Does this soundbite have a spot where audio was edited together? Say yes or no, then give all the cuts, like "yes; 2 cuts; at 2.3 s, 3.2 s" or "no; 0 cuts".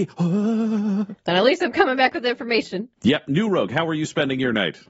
yes; 2 cuts; at 1.2 s, 3.0 s